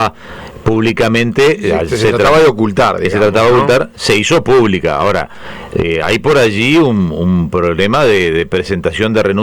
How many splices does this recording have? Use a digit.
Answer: 0